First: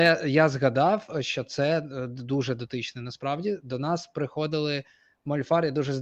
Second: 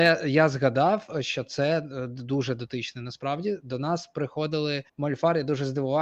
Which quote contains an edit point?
second; 1 cut; at 4.9 s

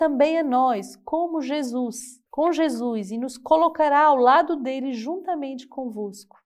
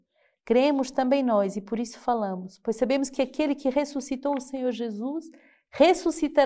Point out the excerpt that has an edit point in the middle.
first; 1 cut; at 2.3 s

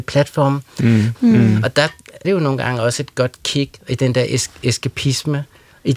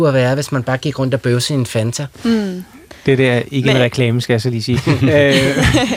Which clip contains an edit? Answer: first; 2 cuts; at 1.1 s, 2.2 s

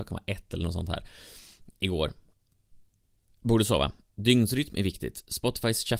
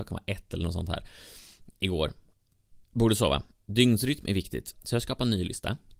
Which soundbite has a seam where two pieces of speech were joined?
second; 2 cuts; at 2.8 s, 4.7 s

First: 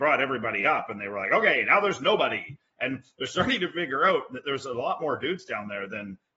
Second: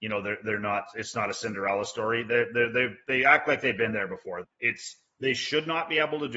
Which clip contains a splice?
second; 1 cut; at 4.4 s

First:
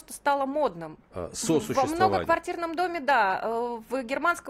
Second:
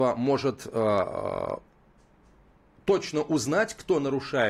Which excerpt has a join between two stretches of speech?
first; 1 cut; at 1.0 s

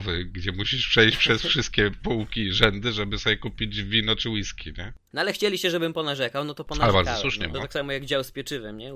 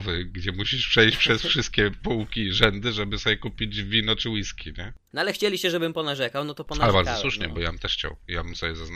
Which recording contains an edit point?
first; 1 cut; at 7.5 s

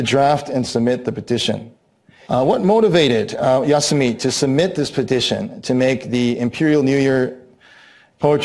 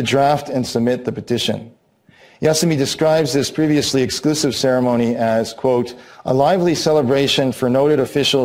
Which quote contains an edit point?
first; 1 cut; at 2.3 s

